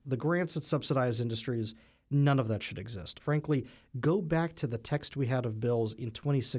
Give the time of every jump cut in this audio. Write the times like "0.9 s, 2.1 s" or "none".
3.2 s